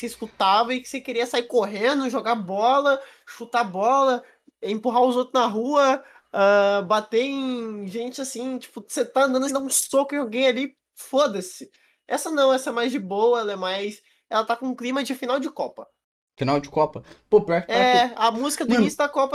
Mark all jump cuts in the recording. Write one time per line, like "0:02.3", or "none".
0:09.5